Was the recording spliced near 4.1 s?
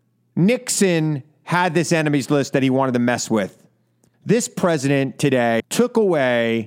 yes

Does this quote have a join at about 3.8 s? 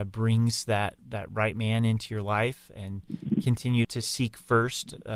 yes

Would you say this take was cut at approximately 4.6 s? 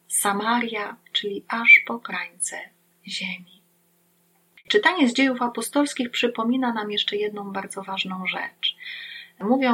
no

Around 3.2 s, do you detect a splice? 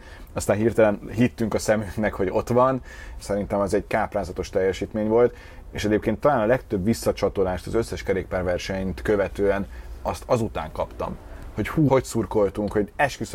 yes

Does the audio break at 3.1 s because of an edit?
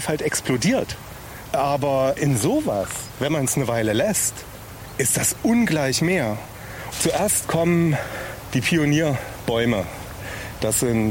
no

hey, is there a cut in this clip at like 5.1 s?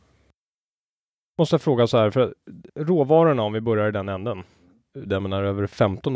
yes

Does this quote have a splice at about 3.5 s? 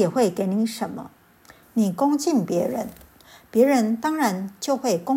no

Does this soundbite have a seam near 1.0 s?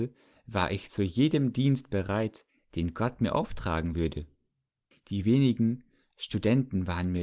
no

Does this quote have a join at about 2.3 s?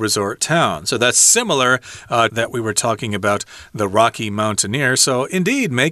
yes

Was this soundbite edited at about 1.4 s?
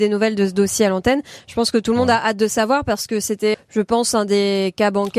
no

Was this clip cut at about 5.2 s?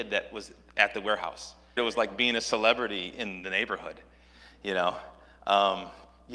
no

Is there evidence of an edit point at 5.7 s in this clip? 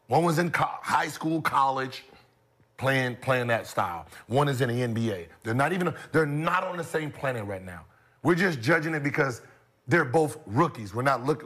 no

